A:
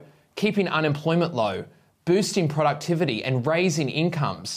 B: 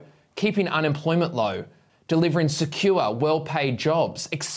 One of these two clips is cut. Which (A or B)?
B